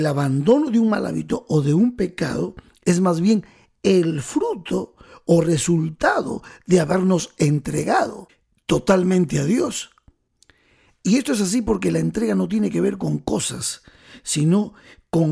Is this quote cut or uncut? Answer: uncut